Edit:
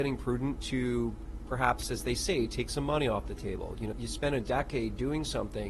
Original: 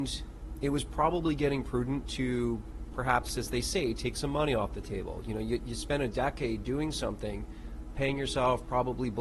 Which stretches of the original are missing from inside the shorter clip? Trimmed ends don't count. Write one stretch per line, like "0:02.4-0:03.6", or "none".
0:05.4-0:05.6